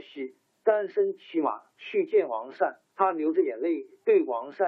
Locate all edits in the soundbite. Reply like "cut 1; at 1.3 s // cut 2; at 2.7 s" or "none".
cut 1; at 2.9 s